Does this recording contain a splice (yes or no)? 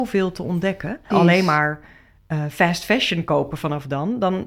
yes